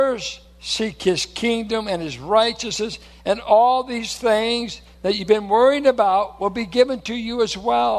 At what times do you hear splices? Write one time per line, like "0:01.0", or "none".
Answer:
none